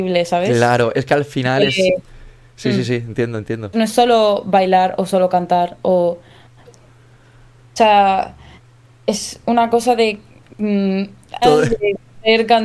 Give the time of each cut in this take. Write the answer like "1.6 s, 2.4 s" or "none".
3.7 s, 6.7 s, 11.4 s